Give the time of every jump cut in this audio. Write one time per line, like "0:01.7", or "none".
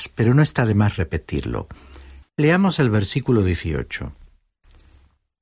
0:02.2